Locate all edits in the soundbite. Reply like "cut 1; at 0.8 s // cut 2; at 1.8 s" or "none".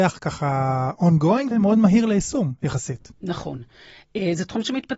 cut 1; at 1.5 s